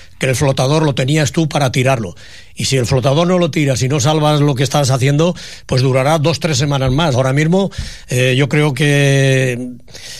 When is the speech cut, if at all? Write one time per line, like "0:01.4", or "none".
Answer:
0:07.1